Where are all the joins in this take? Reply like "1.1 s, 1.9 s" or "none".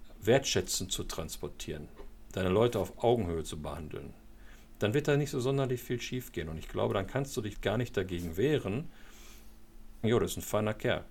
7.5 s, 10.0 s